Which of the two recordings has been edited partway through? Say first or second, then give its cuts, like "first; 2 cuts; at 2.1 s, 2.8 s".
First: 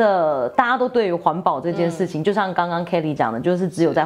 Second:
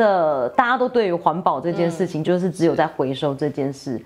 second; 1 cut; at 2.2 s